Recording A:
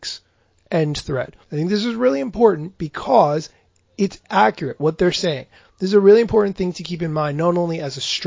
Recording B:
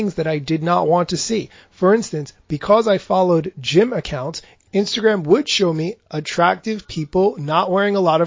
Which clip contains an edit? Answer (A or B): A